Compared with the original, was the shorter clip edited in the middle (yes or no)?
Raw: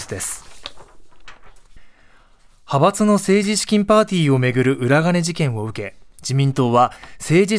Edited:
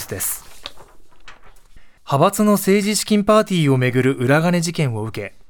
yes